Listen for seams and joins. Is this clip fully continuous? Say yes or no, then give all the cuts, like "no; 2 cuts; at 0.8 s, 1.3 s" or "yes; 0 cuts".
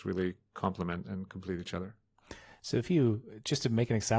yes; 0 cuts